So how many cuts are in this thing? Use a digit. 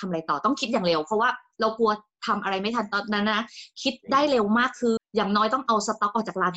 1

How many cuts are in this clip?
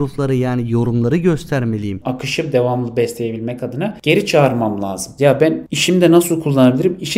2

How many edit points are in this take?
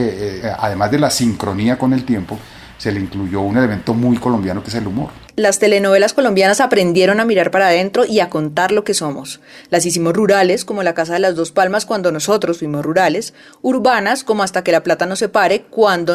1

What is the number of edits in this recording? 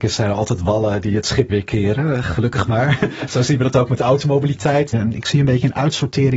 2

